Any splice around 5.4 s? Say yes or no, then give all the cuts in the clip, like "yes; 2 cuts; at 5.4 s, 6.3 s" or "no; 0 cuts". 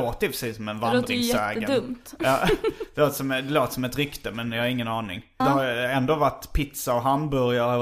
yes; 1 cut; at 5.4 s